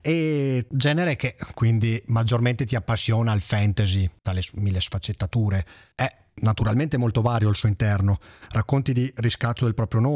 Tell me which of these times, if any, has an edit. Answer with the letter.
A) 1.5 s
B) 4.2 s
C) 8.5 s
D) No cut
C